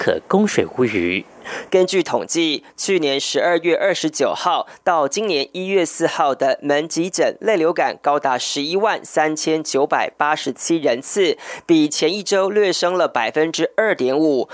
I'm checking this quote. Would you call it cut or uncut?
cut